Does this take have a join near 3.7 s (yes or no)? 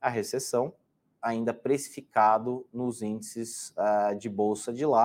no